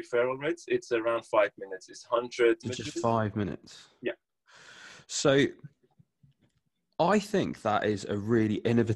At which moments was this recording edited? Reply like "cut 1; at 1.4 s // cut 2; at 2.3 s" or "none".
cut 1; at 2.6 s